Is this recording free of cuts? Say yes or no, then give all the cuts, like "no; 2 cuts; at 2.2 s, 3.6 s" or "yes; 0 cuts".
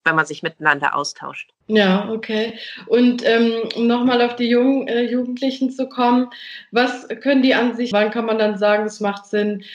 no; 2 cuts; at 1.6 s, 7.9 s